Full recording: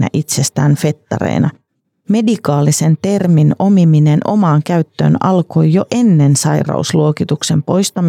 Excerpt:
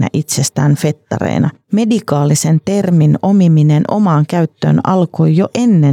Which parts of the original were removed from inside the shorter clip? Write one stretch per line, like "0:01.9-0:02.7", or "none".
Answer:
0:01.6-0:02.0